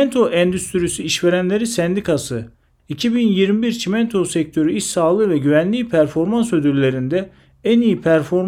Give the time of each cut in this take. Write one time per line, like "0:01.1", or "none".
0:02.8